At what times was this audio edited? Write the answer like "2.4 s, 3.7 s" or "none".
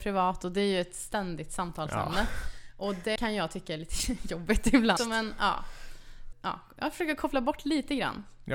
3.2 s, 5.0 s, 6.3 s